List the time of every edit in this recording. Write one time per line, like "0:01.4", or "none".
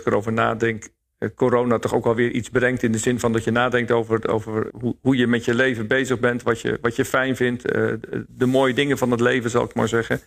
0:04.7

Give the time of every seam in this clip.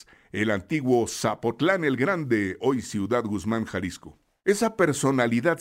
none

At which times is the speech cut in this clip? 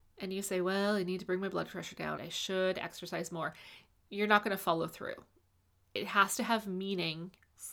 0:02.2

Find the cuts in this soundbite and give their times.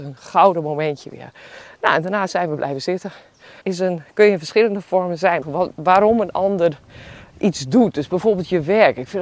0:03.6
0:05.4

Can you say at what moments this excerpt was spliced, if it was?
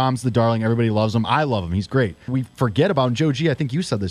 0:02.3

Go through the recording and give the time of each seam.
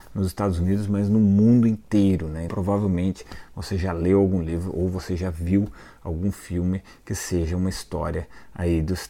0:02.5

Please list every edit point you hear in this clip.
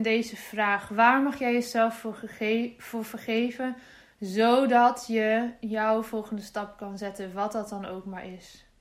none

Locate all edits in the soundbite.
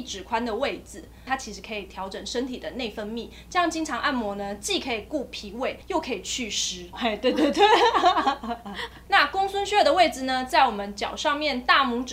0:01.3
0:06.9
0:09.1

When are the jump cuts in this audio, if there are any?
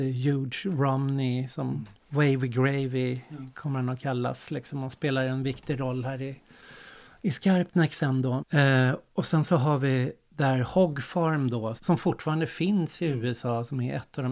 0:02.0
0:08.4
0:11.8

